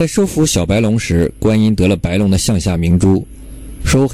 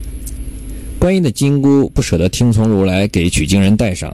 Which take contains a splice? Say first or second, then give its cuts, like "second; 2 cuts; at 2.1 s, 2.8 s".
second; 1 cut; at 0.9 s